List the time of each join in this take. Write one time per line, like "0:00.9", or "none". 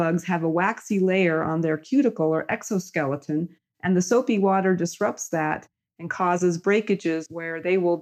none